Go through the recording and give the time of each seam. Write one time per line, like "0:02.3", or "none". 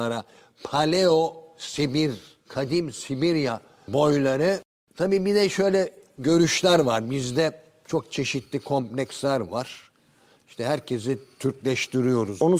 0:02.4